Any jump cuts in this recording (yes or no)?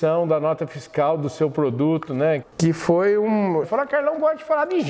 yes